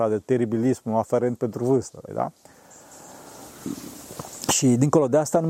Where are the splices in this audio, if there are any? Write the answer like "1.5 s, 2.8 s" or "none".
2.1 s